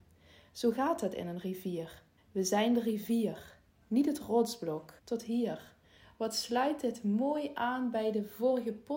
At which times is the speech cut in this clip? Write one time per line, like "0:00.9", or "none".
0:02.2
0:05.0